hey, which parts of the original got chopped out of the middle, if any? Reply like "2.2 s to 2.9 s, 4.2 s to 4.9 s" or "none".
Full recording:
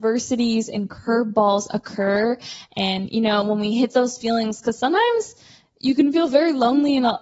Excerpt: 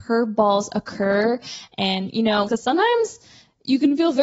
3.4 s to 4.6 s